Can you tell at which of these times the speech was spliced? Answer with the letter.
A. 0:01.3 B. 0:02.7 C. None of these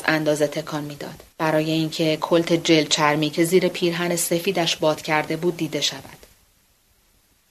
A